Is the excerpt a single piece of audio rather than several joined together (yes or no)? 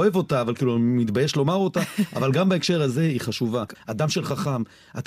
no